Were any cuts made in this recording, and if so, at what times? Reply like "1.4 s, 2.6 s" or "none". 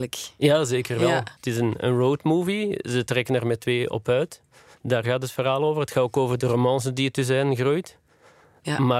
1.4 s